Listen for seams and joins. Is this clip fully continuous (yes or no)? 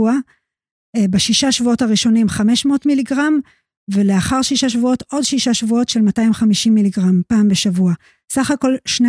yes